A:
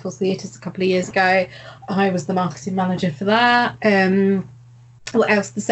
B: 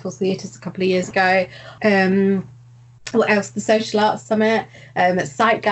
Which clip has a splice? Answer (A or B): B